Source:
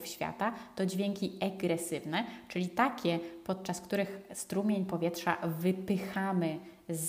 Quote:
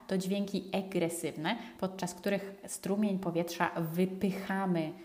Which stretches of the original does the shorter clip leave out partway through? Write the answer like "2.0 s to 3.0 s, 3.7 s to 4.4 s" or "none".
2.4 s to 3.4 s

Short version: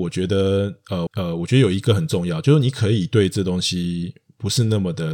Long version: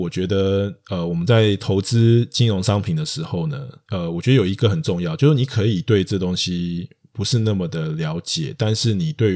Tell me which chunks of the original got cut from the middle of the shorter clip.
1.1 s to 3.8 s

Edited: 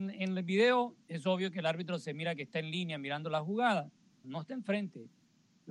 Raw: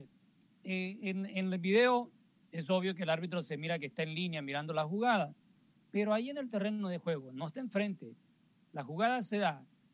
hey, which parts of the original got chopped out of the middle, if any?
2.2 s to 2.5 s, 5.7 s to 7.3 s

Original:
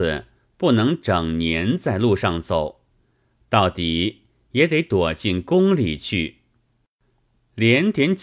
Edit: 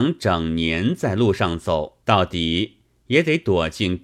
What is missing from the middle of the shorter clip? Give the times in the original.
2.9 s to 3.5 s

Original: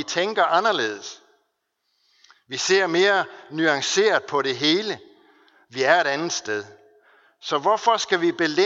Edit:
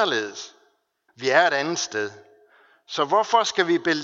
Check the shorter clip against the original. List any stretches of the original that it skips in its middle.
1.8 s to 5.6 s

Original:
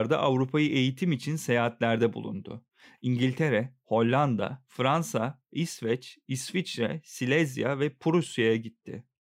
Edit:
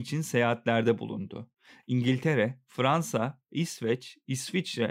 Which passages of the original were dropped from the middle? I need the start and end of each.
3.8 s to 4.7 s

